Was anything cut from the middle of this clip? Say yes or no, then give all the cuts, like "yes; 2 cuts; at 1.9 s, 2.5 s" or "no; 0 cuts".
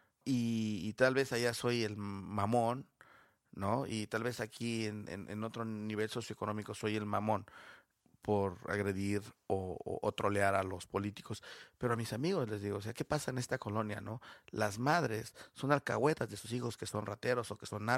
no; 0 cuts